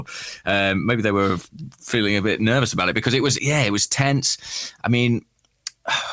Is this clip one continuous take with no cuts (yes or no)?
no